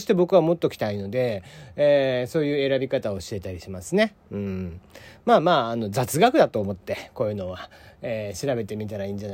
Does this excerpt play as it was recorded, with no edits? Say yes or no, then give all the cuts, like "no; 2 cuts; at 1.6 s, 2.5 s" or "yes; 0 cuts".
yes; 0 cuts